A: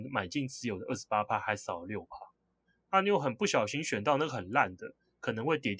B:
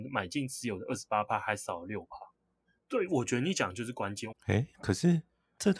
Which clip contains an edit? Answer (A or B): B